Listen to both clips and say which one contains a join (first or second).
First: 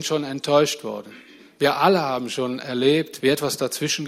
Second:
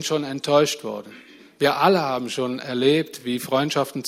first